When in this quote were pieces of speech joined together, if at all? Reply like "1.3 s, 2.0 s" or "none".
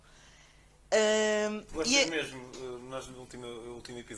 none